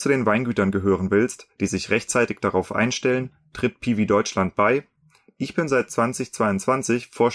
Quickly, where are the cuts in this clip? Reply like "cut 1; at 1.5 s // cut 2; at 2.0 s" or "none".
none